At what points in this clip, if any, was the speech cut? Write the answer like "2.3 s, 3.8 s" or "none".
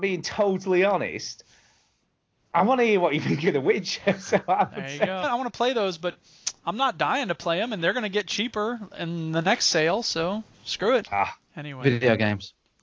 5.2 s, 11.1 s